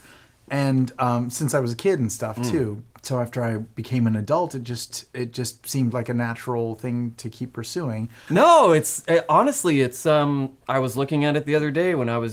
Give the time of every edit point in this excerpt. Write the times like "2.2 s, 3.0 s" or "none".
2.9 s, 8.3 s